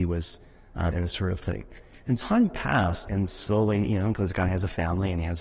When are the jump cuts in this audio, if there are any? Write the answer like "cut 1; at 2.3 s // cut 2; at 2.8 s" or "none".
cut 1; at 0.9 s // cut 2; at 3.1 s